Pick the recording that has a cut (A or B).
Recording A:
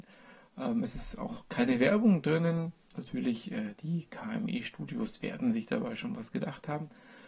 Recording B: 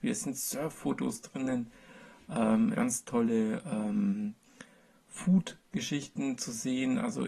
B